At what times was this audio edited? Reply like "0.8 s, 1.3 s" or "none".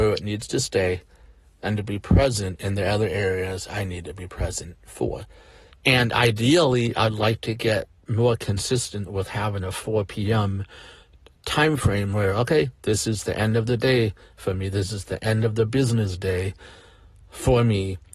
5.7 s